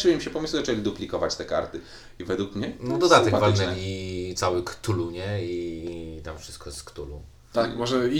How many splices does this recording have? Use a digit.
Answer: 0